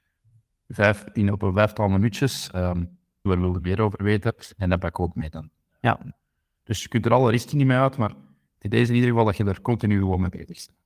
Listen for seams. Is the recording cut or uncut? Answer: cut